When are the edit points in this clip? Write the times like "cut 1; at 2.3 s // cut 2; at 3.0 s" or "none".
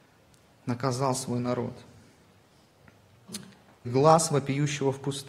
cut 1; at 3.8 s